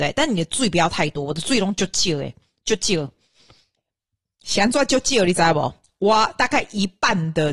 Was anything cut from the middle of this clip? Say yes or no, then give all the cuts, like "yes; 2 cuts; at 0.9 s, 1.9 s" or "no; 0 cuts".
no; 0 cuts